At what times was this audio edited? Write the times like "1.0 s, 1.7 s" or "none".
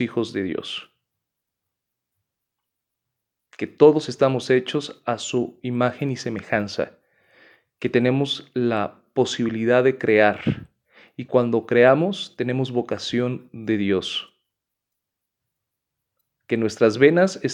none